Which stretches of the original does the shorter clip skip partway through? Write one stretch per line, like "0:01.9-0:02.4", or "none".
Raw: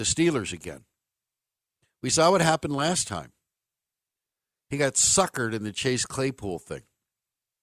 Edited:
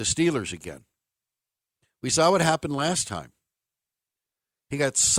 none

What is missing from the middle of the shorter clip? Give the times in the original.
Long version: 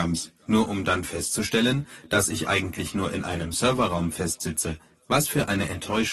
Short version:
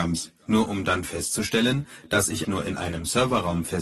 0:02.4-0:02.9

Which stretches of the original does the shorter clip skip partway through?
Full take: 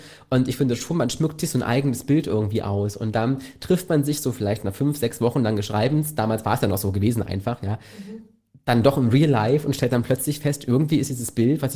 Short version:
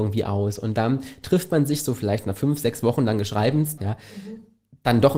0:06.2-0:07.6

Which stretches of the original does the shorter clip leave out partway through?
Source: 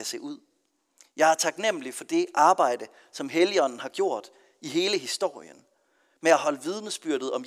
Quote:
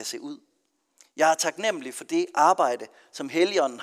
none

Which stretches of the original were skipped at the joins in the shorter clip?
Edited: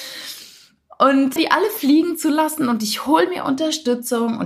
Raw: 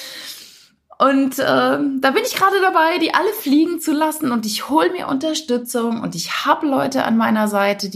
0:01.4-0:03.0

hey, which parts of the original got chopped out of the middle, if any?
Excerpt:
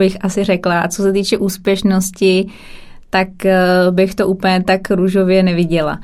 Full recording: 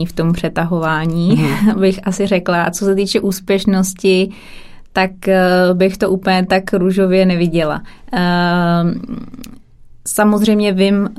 none

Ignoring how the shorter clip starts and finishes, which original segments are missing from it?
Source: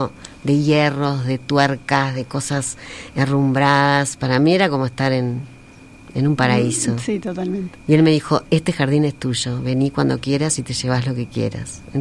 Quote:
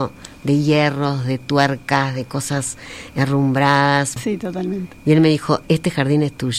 0:04.2-0:07.0

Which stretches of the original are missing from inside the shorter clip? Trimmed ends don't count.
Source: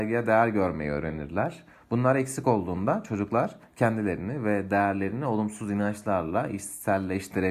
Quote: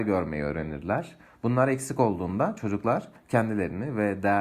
none

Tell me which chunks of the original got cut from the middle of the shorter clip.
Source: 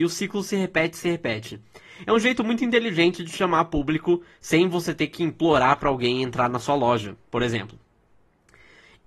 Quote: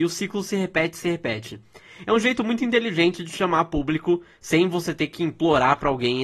none

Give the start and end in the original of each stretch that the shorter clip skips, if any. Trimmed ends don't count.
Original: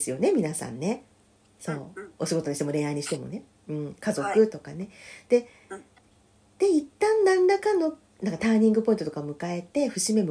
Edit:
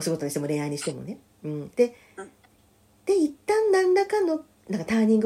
0:04.0-0:05.3

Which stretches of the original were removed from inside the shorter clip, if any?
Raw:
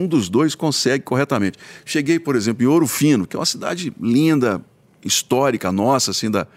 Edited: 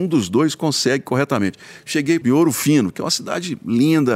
0:02.2-0:02.6

